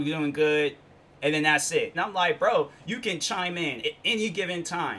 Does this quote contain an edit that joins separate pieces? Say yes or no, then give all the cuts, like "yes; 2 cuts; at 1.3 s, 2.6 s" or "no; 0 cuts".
yes; 2 cuts; at 1.9 s, 3.8 s